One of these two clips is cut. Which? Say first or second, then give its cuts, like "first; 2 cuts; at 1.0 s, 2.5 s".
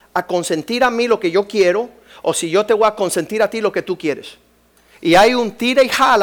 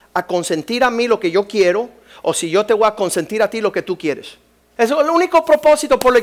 second; 1 cut; at 4.6 s